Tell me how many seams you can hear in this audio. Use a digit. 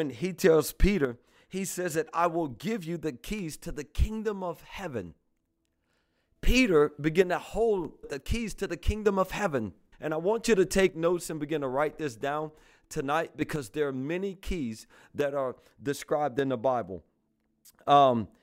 2